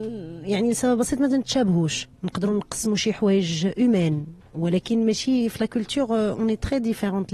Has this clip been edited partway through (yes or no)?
yes